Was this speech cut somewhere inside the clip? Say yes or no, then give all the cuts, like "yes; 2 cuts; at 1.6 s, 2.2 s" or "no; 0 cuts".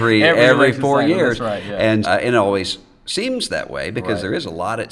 yes; 1 cut; at 2.0 s